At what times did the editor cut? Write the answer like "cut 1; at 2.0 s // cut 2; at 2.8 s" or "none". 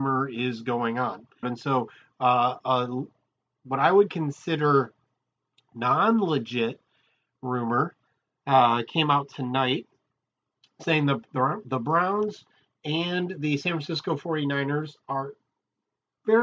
cut 1; at 1.4 s